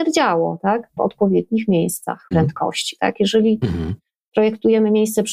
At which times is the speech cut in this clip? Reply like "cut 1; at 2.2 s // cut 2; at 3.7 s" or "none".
cut 1; at 1.0 s // cut 2; at 2.3 s